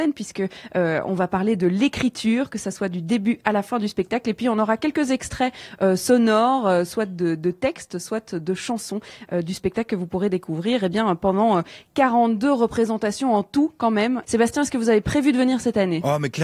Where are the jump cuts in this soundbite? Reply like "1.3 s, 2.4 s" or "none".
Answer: 14.2 s